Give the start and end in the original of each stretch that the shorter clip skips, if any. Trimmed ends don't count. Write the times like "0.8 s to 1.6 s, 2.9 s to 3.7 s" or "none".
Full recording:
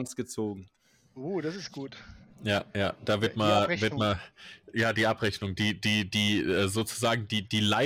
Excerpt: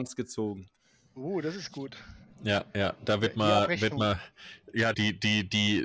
4.9 s to 5.5 s